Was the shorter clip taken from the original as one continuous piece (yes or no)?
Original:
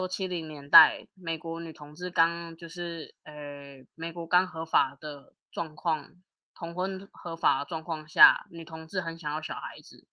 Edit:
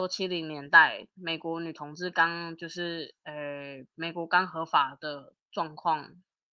yes